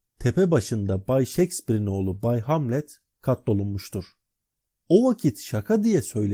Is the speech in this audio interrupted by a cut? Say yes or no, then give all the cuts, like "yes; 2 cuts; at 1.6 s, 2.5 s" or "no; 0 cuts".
no; 0 cuts